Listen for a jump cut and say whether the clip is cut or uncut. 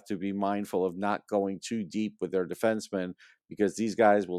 uncut